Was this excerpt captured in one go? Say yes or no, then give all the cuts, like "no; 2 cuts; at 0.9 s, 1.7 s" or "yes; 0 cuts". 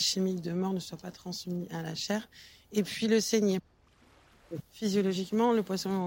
no; 1 cut; at 4.6 s